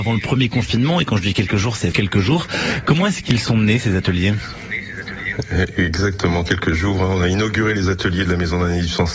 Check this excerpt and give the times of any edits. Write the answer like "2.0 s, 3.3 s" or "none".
1.9 s